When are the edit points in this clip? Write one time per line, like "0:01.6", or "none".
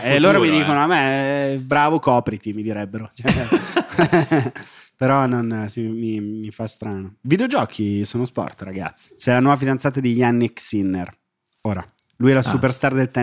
0:09.1